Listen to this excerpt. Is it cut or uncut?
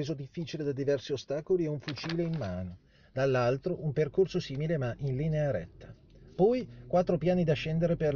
uncut